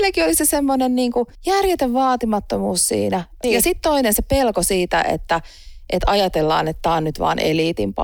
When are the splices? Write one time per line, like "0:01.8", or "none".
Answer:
0:01.4
0:03.4